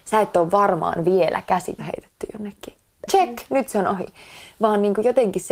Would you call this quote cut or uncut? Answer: cut